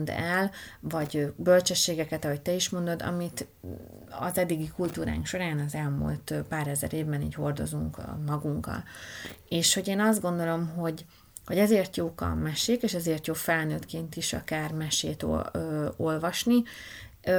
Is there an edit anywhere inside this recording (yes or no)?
no